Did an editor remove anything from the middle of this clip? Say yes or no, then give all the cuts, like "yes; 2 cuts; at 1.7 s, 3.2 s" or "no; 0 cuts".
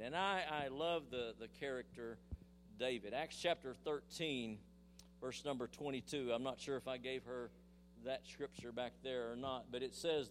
no; 0 cuts